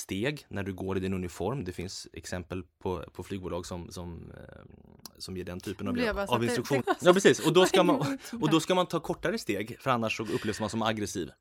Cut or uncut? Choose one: cut